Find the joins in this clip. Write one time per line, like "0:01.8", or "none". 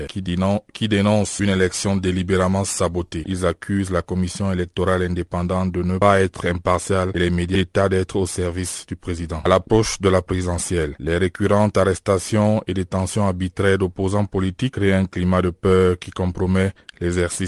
0:03.2
0:09.4

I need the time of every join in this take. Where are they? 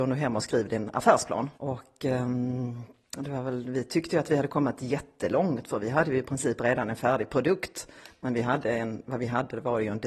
0:01.5

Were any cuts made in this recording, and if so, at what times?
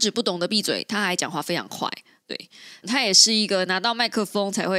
0:02.8

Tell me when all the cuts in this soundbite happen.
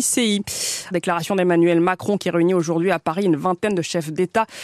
0:00.9

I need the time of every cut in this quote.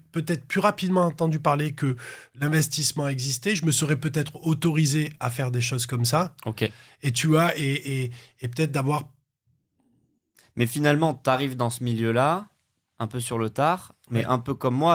none

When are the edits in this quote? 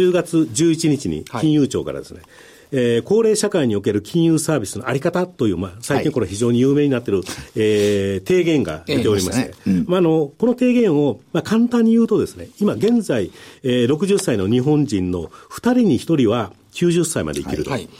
none

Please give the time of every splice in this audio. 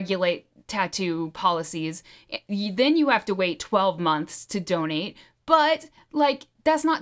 none

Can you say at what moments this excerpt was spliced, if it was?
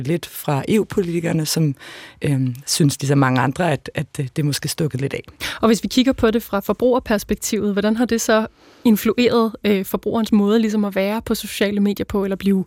none

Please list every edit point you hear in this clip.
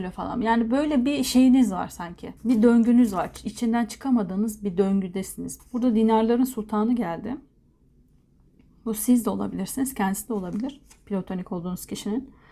0:02.4
0:05.6

